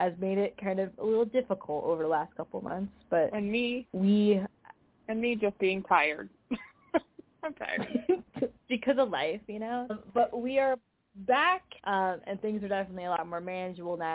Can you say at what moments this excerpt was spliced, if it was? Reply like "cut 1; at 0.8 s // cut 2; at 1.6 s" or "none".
cut 1; at 9.9 s // cut 2; at 11.8 s